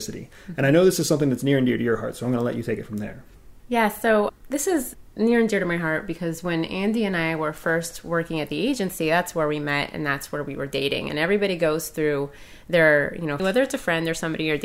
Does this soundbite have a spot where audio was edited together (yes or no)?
yes